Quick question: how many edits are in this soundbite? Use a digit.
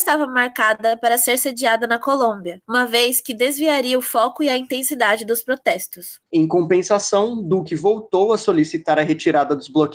1